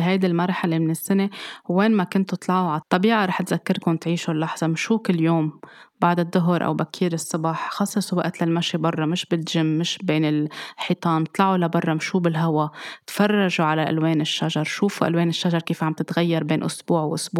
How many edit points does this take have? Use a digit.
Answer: 1